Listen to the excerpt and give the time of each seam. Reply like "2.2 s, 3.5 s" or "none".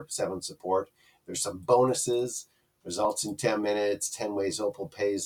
none